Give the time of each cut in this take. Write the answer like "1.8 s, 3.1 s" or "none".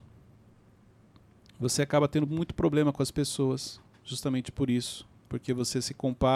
none